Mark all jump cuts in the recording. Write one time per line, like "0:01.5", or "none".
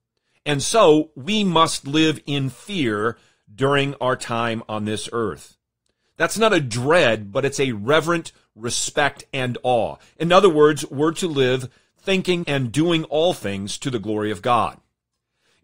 0:12.4